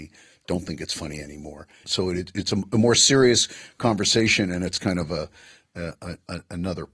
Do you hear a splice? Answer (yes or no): yes